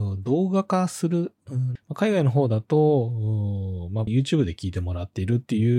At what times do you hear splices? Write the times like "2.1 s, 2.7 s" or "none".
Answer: 1.8 s, 4.1 s